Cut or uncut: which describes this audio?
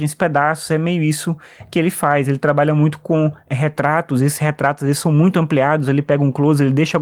uncut